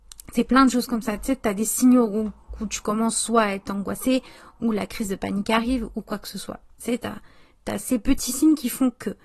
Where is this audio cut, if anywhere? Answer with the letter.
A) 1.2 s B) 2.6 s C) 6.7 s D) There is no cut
D